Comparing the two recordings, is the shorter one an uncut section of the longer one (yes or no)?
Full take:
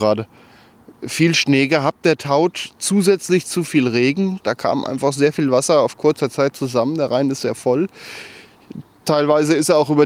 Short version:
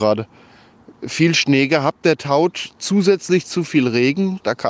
yes